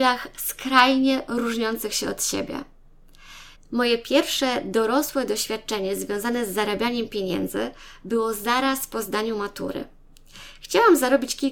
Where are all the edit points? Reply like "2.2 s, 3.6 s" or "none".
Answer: 3.6 s